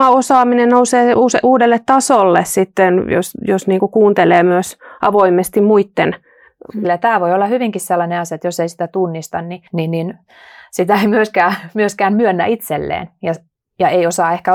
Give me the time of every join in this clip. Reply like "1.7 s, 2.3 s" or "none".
6.8 s, 9.7 s